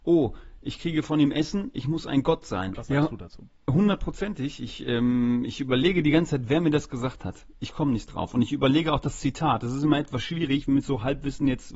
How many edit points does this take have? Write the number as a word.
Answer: one